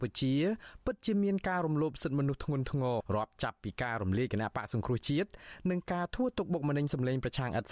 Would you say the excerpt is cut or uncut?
cut